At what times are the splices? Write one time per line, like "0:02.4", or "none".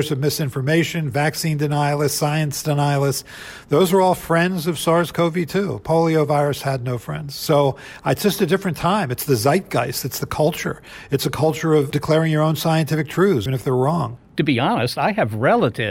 0:13.5